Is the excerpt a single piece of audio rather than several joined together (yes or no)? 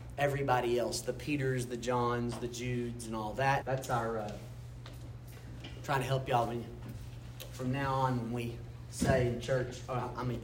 no